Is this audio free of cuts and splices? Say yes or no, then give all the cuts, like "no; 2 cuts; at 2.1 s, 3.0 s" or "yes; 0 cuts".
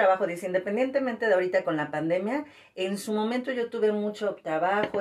yes; 0 cuts